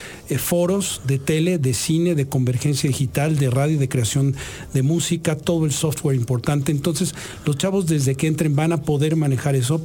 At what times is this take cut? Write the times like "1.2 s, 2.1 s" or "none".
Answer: none